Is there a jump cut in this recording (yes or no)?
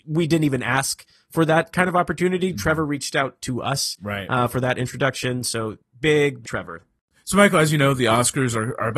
yes